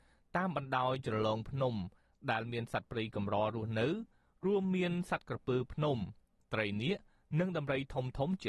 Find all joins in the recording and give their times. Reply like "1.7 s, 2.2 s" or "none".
none